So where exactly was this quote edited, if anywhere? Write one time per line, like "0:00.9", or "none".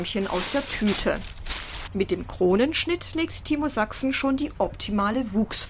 0:01.9